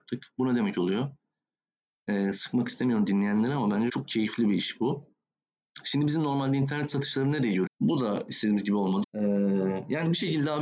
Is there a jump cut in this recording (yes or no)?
yes